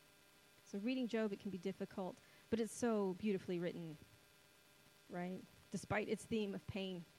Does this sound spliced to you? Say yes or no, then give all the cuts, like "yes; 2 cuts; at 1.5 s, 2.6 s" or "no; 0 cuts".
no; 0 cuts